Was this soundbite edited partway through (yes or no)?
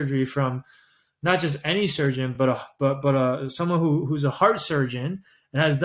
no